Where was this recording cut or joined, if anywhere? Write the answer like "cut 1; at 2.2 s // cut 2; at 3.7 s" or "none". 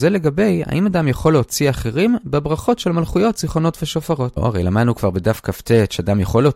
cut 1; at 4.4 s